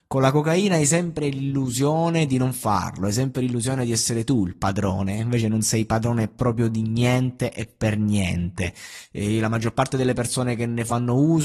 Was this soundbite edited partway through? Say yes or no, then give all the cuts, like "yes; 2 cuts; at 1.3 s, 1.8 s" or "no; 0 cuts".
no; 0 cuts